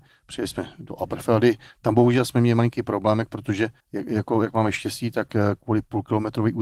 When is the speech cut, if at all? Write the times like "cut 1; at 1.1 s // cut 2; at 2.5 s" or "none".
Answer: cut 1; at 3.8 s